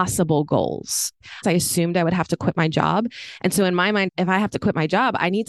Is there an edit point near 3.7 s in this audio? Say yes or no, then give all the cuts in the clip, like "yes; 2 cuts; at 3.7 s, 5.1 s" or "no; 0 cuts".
no; 1 cut; at 1.4 s